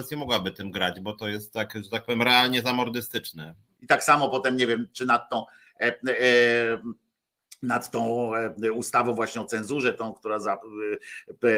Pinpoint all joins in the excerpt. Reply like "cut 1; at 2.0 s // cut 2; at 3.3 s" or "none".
cut 1; at 3.8 s